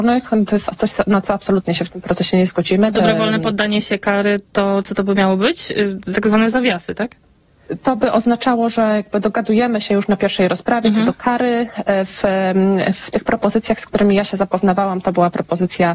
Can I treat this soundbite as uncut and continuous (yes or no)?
no